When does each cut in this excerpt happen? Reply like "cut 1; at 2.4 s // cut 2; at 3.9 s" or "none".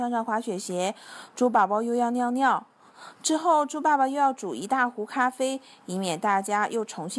cut 1; at 2.9 s